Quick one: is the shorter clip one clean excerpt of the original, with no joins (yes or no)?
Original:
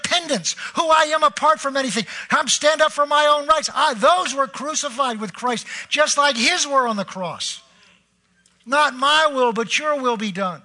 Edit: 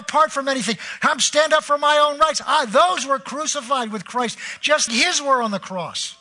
no